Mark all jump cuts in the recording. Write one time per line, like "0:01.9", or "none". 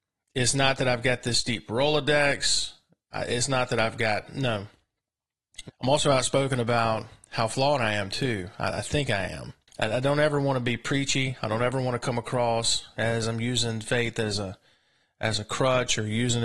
0:05.7